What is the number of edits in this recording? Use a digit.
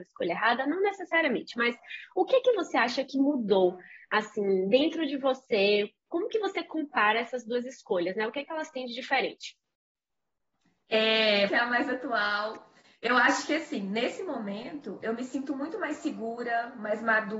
1